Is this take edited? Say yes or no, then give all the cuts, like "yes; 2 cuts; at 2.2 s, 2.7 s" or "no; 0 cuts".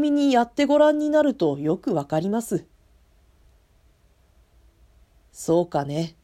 no; 0 cuts